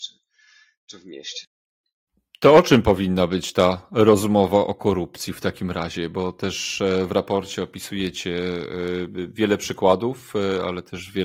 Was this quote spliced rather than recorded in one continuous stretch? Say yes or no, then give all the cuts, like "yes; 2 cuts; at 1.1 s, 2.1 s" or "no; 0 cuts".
no; 0 cuts